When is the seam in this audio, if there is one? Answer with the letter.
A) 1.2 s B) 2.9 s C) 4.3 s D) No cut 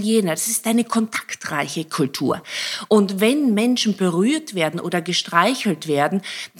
B